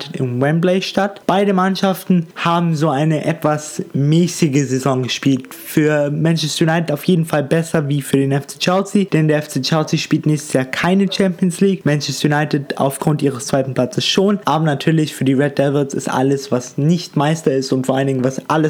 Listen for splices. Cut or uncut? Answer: uncut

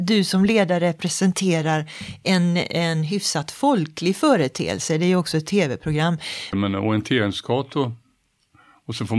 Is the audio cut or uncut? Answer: cut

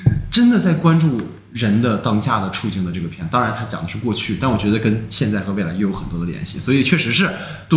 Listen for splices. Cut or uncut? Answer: uncut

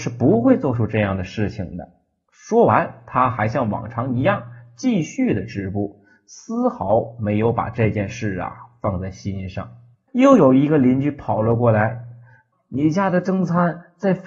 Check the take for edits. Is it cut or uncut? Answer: cut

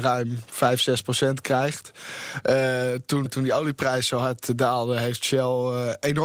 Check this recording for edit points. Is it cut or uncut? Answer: cut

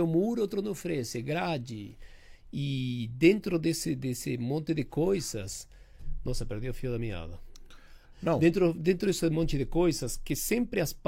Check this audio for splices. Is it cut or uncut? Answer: uncut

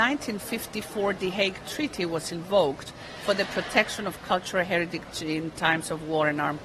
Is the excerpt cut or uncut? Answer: uncut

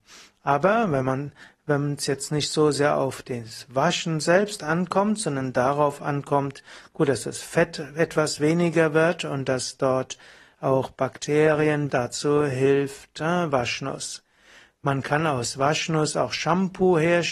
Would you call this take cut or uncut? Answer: cut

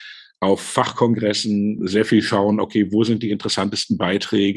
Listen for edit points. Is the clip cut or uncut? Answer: cut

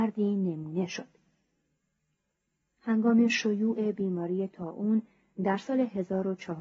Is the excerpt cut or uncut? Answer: cut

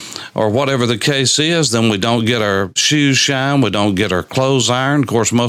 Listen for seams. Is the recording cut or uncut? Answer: uncut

